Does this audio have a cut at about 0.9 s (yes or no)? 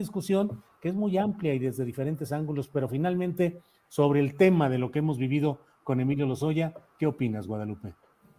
no